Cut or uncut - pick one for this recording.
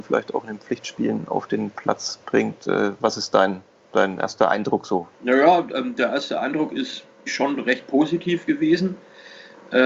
cut